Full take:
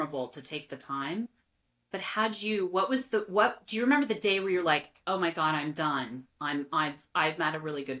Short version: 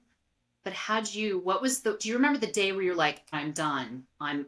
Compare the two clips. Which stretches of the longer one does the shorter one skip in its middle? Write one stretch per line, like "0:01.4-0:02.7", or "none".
0:03.3-0:03.7
0:05.0-0:05.5